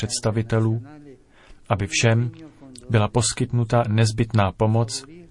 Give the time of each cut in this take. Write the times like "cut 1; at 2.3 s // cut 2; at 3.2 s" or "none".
cut 1; at 2.8 s